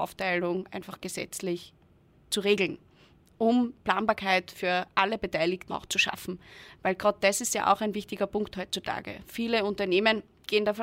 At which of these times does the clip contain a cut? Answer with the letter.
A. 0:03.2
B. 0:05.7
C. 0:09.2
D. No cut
B